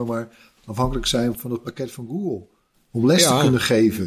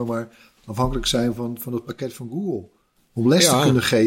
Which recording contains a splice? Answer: first; 1 cut; at 1.3 s

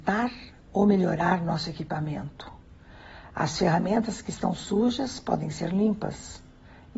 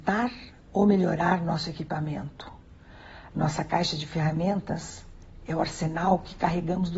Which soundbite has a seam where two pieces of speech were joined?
second; 1 cut; at 3.3 s

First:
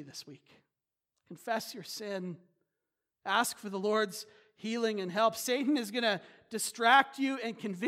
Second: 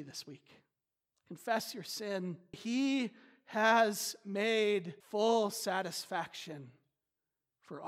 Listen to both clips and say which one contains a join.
second; 2 cuts; at 2.5 s, 5.0 s

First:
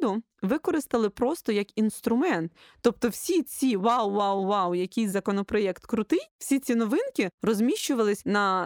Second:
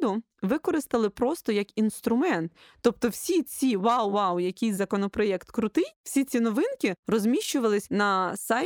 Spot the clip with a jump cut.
second; 1 cut; at 4.1 s

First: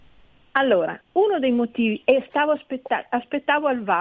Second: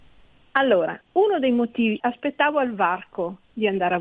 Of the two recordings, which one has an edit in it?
second; 1 cut; at 2.0 s

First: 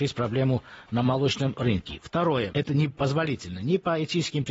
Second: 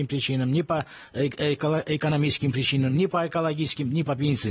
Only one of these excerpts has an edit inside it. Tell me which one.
first; 1 cut; at 2.5 s

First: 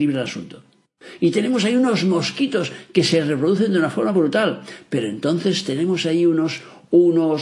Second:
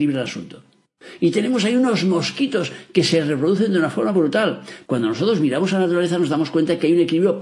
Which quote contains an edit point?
second; 1 cut; at 4.9 s

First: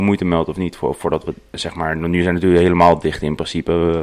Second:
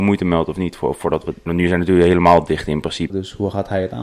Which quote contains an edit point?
second; 2 cuts; at 1.5 s, 3.1 s

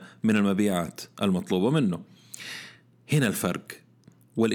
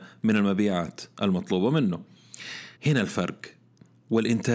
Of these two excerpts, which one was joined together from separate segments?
second; 1 cut; at 2.8 s

